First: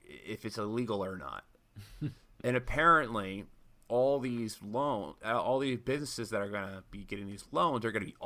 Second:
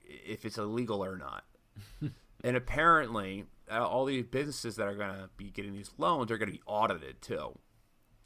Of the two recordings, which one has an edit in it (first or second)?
second